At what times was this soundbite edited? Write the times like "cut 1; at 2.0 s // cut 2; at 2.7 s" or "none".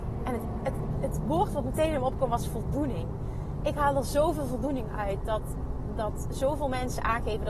cut 1; at 0.9 s